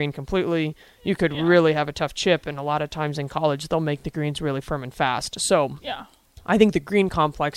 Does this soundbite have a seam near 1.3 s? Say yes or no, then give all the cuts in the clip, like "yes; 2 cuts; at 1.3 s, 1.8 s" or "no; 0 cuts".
no; 0 cuts